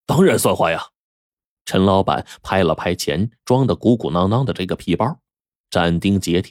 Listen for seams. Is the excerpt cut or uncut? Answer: uncut